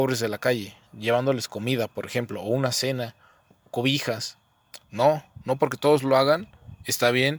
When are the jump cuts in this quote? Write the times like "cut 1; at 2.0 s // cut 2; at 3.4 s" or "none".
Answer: cut 1; at 4.8 s

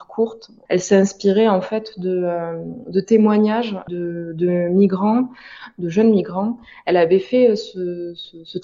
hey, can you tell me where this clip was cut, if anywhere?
none

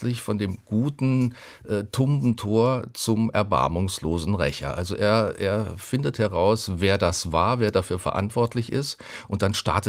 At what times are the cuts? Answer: none

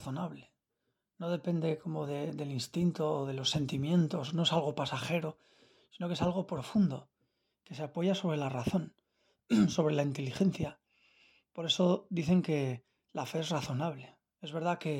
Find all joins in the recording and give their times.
none

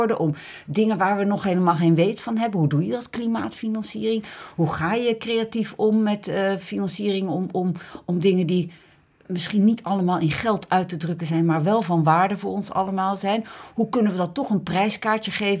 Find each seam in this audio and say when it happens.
none

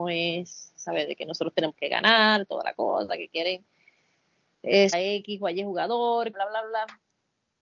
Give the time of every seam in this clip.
cut 1; at 4.9 s // cut 2; at 6.3 s

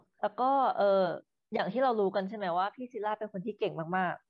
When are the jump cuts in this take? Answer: none

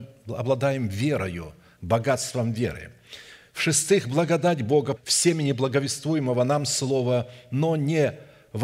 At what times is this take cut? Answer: cut 1; at 5.0 s

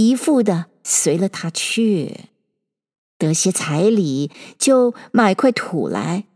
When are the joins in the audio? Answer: none

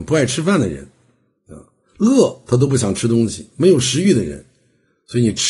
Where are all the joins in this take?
none

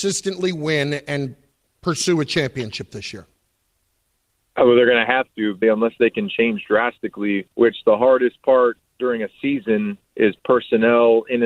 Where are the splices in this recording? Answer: cut 1; at 5.6 s // cut 2; at 7.5 s // cut 3; at 10.1 s

